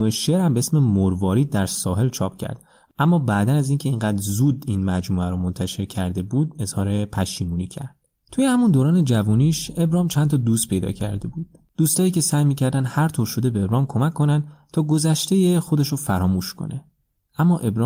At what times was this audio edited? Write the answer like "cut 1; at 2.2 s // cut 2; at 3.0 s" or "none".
cut 1; at 8.2 s